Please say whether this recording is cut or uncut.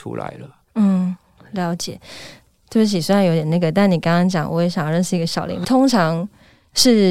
cut